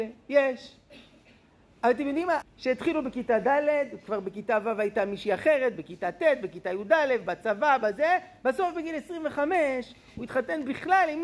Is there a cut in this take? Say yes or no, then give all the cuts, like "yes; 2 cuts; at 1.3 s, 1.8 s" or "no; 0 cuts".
yes; 1 cut; at 2.4 s